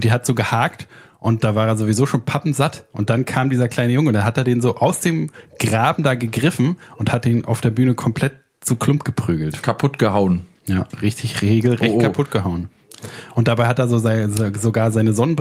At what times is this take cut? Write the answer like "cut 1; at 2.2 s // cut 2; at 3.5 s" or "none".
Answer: none